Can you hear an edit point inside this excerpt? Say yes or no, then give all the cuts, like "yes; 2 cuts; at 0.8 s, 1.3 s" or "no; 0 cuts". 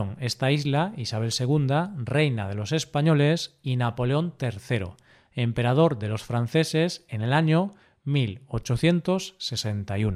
no; 0 cuts